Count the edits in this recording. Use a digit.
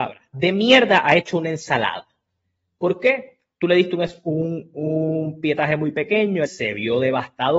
1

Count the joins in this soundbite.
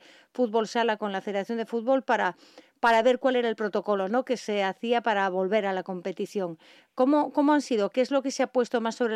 0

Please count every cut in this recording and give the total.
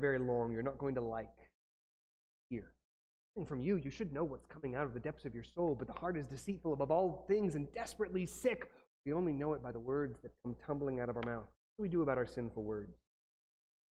2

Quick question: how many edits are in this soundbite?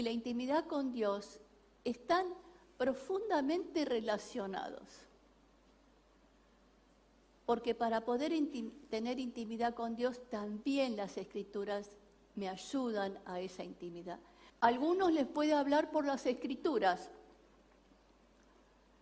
1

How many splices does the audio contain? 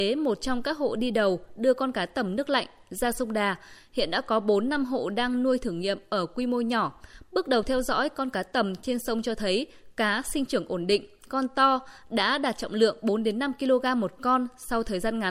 0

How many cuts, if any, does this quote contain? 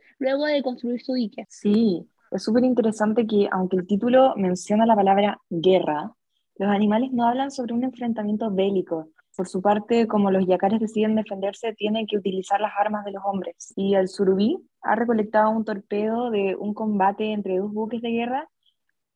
2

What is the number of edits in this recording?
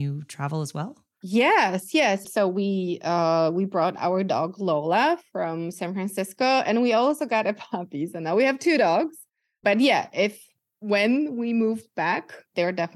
1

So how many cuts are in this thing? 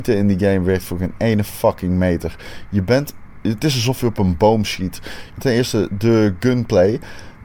2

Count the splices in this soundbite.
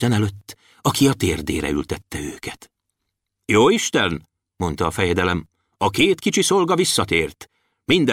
0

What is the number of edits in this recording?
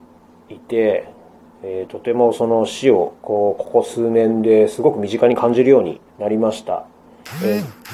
2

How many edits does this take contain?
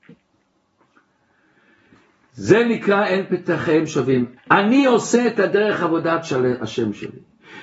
1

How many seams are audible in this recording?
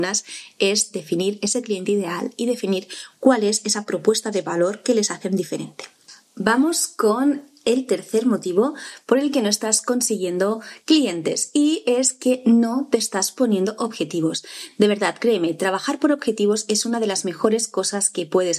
0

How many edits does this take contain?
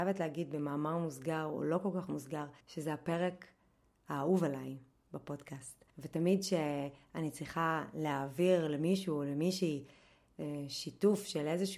2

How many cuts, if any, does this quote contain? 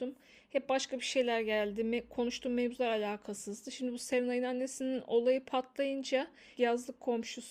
1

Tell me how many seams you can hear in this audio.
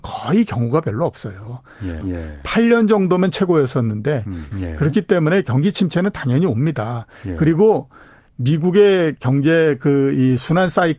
2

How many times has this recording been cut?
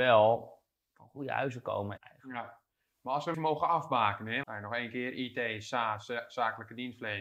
3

